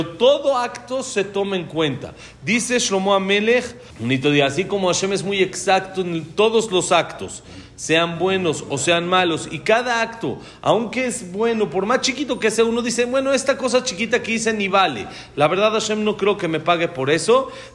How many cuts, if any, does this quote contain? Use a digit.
1